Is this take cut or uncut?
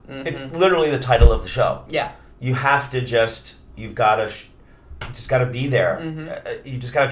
uncut